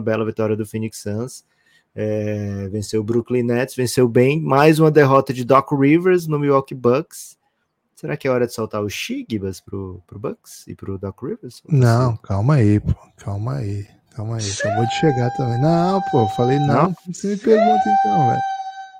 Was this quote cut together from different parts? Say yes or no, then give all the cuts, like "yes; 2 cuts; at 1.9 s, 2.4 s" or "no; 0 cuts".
no; 0 cuts